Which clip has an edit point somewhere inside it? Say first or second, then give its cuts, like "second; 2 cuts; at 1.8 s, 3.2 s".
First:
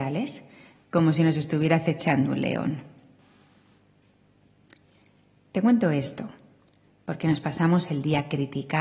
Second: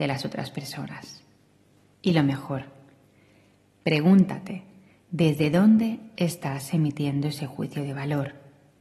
second; 1 cut; at 1.9 s